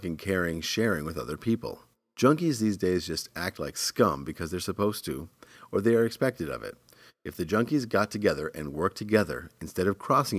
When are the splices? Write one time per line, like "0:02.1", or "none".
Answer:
none